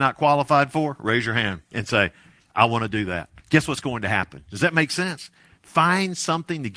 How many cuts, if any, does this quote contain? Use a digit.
2